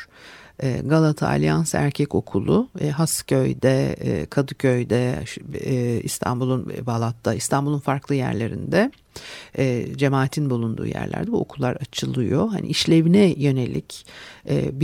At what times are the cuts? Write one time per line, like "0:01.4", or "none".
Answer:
none